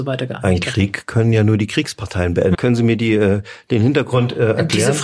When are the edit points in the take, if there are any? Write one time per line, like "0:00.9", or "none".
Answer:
0:02.5